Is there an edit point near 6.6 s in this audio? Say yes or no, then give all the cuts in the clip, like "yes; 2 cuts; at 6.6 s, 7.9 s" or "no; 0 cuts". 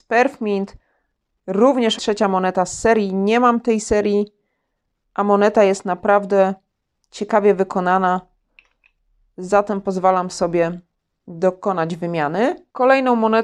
no; 1 cut; at 2.0 s